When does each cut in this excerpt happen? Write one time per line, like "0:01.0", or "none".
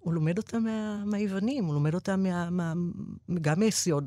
none